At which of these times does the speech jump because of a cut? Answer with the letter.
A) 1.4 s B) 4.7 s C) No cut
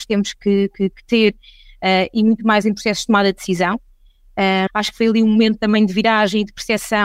B